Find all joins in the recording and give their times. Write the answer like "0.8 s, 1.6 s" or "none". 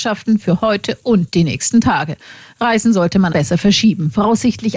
3.3 s